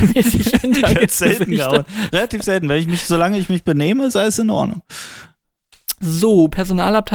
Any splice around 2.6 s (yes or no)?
no